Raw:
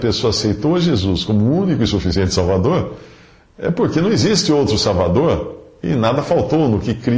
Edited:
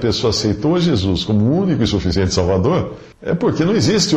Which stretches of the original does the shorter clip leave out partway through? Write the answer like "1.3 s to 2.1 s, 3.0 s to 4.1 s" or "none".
3.1 s to 3.5 s